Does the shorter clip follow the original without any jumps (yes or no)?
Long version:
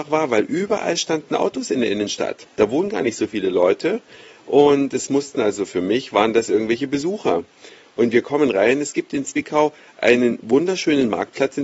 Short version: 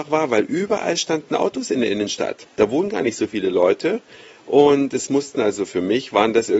yes